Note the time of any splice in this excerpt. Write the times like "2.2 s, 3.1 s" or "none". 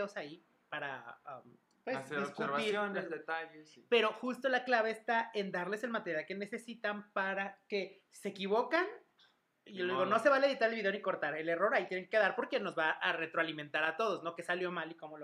none